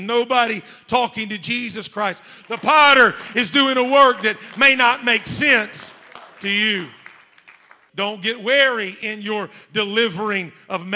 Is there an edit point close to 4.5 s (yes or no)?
no